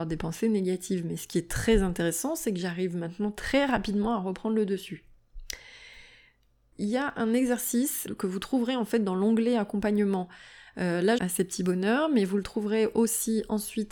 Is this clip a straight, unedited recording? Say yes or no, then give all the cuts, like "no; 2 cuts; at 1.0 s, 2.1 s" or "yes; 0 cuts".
no; 3 cuts; at 6.7 s, 8.1 s, 11.2 s